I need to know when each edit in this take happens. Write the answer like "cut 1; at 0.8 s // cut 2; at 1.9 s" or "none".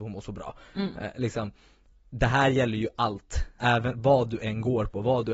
cut 1; at 3.6 s